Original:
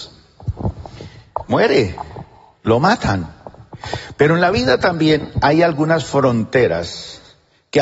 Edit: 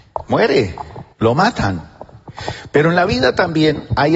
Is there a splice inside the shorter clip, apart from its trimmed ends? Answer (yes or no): yes